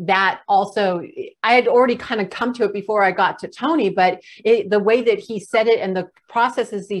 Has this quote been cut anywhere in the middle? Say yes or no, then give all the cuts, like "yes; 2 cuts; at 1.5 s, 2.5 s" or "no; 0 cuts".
no; 0 cuts